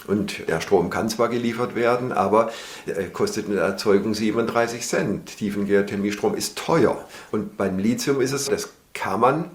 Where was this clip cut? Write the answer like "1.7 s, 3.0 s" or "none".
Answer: 7.3 s, 8.5 s